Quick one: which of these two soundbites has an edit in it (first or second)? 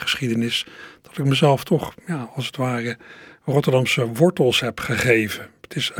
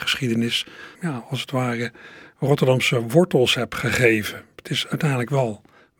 second